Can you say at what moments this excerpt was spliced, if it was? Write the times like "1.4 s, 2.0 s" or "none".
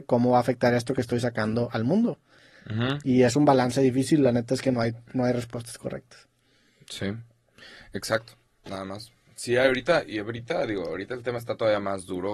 none